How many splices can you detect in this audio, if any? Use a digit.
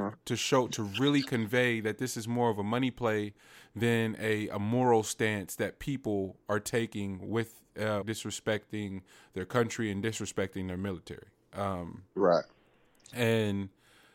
1